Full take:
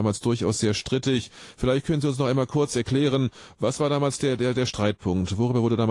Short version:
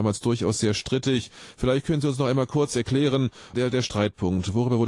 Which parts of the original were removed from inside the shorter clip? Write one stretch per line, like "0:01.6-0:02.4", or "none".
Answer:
0:03.5-0:04.4